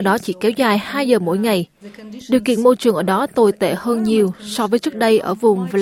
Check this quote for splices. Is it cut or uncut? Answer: uncut